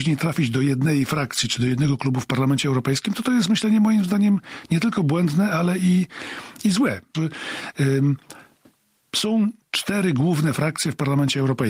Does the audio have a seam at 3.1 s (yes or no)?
no